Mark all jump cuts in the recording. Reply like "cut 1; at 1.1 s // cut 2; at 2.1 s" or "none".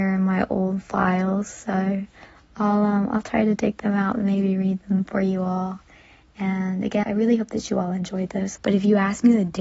cut 1; at 7.0 s // cut 2; at 8.6 s

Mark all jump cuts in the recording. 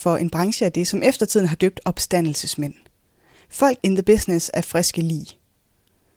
cut 1; at 3.8 s

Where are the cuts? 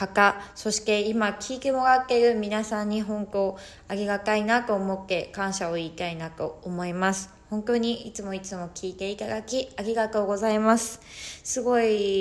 none

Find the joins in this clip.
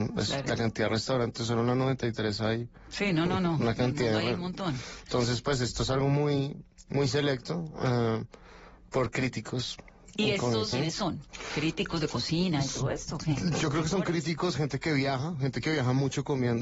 cut 1; at 10.7 s

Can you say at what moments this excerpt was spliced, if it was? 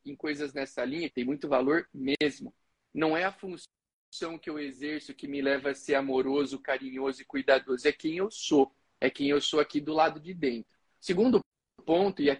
cut 1; at 1.1 s // cut 2; at 10.9 s

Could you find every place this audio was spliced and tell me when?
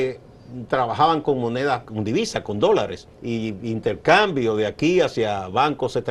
cut 1; at 1.8 s // cut 2; at 3.1 s

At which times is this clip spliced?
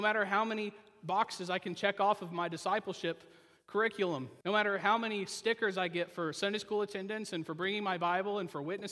cut 1; at 4.4 s

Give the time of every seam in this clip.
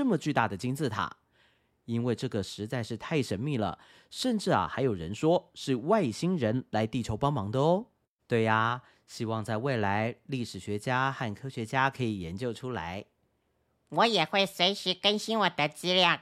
cut 1; at 8.2 s

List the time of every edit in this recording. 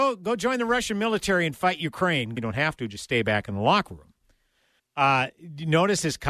cut 1; at 2.4 s // cut 2; at 4.8 s

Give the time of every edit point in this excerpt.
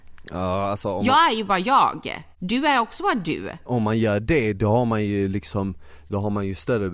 none

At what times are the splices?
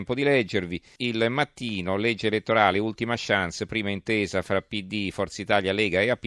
cut 1; at 1.0 s

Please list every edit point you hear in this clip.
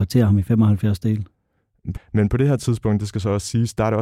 cut 1; at 1.9 s

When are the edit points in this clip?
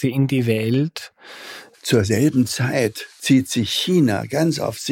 cut 1; at 1.7 s

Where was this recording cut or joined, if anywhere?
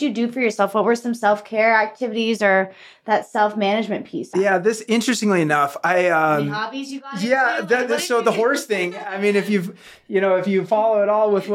cut 1; at 4.3 s

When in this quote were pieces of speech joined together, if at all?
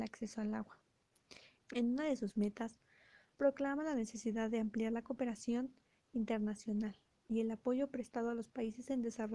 cut 1; at 1.6 s

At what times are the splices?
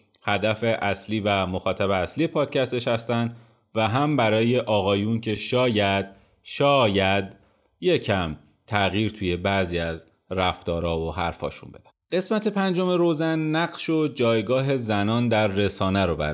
none

